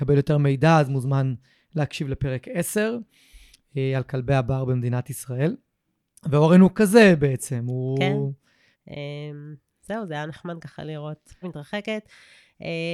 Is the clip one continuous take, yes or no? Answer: no